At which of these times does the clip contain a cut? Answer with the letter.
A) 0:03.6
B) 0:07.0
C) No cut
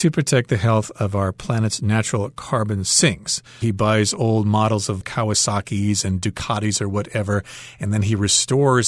A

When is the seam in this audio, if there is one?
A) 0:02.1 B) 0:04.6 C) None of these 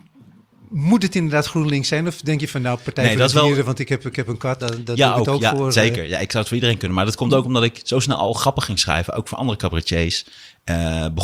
B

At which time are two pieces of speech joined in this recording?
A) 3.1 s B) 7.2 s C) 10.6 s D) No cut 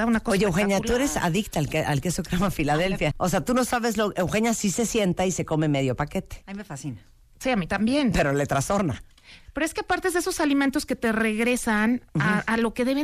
A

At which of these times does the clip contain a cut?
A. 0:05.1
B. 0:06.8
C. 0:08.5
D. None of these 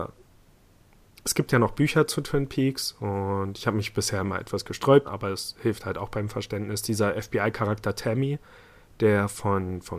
A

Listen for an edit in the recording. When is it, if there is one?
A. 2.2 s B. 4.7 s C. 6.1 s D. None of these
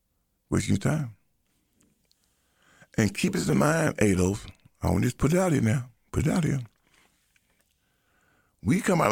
D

